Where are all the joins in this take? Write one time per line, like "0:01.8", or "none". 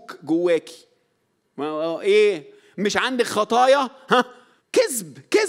0:04.6